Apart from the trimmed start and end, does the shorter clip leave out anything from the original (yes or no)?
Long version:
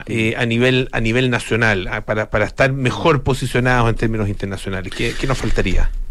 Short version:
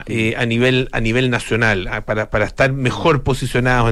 no